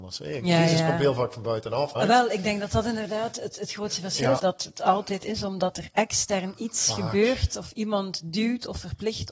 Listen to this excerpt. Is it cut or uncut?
cut